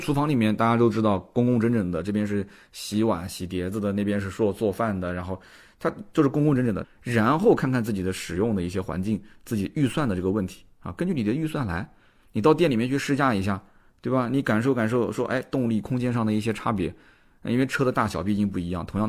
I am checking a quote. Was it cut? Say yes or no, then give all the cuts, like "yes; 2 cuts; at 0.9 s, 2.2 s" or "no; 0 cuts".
yes; 1 cut; at 6.8 s